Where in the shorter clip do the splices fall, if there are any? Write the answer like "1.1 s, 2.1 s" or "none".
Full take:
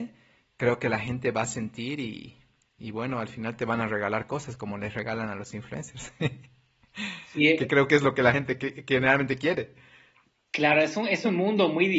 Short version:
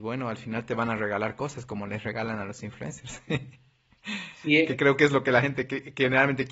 none